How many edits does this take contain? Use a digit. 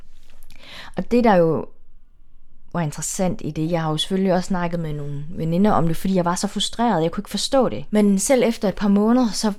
1